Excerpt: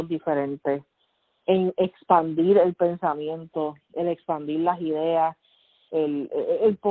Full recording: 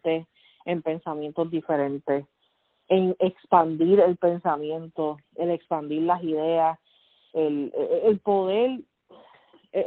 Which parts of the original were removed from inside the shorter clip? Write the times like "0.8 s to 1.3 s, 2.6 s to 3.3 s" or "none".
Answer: none